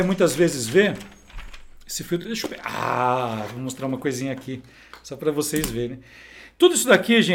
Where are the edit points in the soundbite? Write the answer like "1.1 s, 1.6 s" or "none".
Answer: none